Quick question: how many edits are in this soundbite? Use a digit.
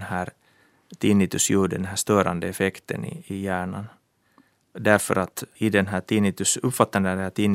0